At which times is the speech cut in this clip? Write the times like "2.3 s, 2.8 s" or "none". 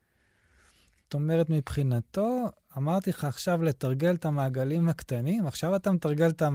1.0 s